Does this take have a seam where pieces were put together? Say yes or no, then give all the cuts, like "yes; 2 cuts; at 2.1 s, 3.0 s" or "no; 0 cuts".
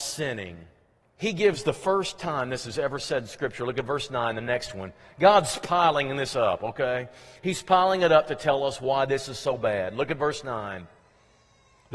yes; 1 cut; at 1.0 s